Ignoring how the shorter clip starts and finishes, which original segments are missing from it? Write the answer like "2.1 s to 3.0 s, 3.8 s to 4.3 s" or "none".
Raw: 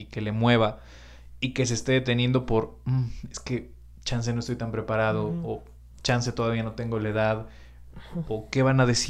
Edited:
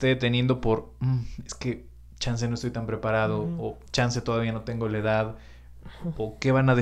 5.7 s to 6.0 s